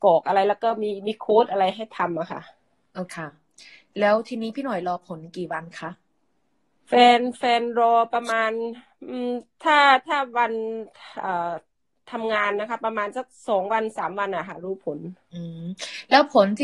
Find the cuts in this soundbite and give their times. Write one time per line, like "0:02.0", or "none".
0:03.1

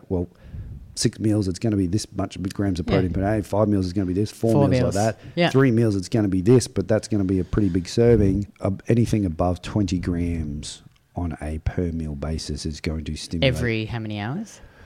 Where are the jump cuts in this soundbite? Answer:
0:08.5

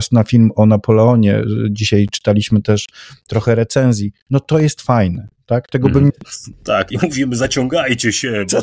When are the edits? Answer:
0:06.1

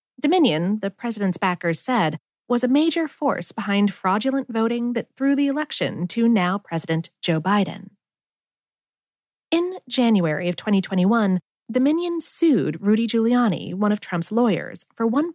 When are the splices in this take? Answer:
none

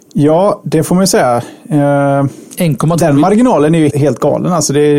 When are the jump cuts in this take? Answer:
0:03.9

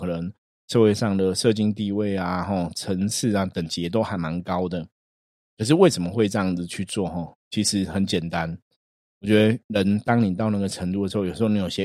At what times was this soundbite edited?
none

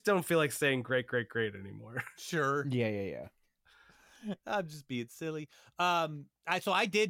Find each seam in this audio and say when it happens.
none

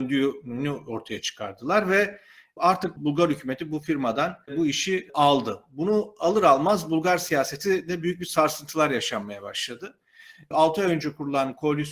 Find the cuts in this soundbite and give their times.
none

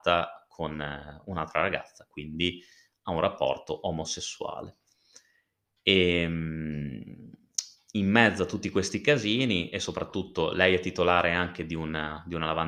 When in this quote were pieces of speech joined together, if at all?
none

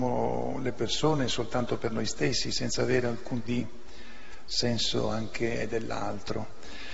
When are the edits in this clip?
0:03.4

